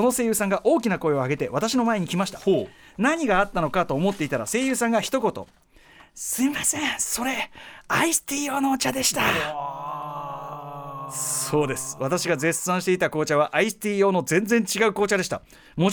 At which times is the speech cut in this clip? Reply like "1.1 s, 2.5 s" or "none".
none